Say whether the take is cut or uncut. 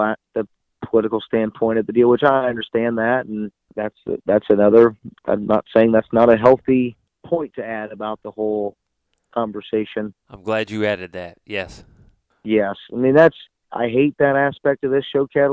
uncut